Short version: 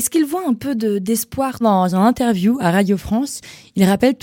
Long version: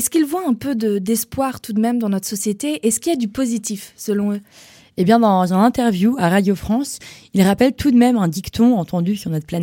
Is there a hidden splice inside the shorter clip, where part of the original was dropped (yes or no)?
yes